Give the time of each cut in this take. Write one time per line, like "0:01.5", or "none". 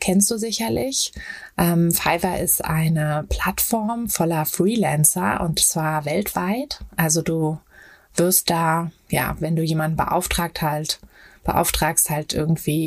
none